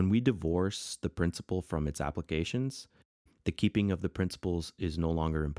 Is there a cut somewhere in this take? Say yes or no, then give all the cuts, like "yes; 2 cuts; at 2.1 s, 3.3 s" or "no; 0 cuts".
no; 0 cuts